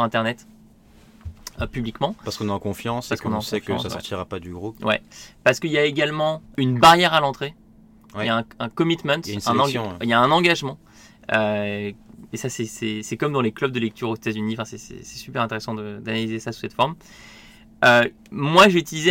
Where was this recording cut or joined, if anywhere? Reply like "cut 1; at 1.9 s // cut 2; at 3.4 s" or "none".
cut 1; at 6.5 s